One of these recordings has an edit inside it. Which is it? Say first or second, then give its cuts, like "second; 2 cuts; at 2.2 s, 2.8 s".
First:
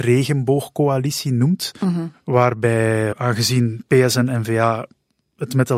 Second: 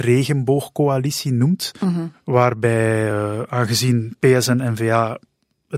first; 1 cut; at 3.1 s